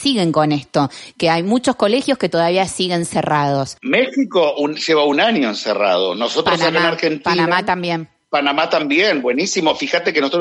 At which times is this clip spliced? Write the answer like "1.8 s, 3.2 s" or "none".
none